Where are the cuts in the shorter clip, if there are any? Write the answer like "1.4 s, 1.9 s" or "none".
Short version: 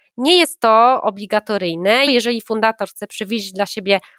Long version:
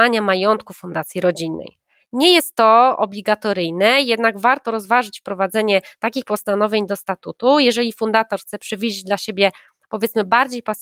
2.1 s